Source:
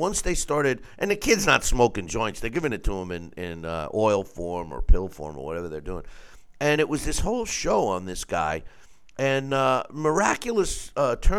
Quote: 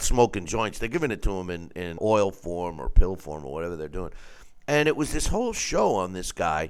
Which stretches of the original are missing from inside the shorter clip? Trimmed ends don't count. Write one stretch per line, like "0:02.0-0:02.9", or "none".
0:03.6-0:03.9